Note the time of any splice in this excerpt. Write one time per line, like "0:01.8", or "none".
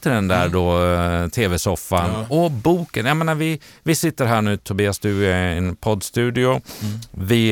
none